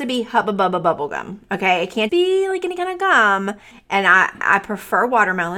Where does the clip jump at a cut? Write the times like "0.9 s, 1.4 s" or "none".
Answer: 2.1 s, 3.7 s